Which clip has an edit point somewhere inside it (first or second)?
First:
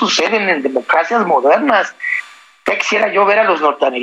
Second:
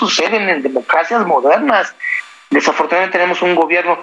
second